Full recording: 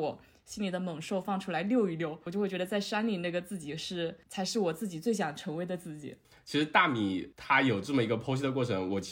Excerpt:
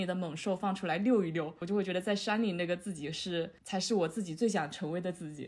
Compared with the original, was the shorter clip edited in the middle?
no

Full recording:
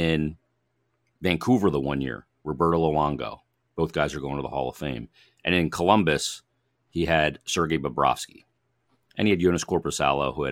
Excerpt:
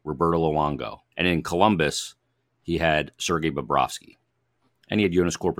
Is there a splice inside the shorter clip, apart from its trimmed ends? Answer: yes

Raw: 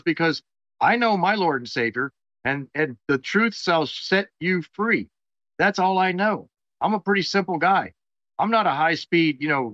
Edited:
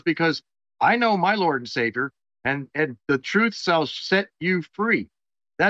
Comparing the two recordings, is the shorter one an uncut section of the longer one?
yes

